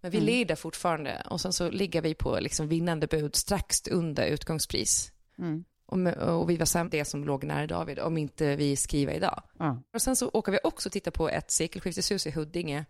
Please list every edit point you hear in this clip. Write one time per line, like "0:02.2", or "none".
0:06.8
0:09.9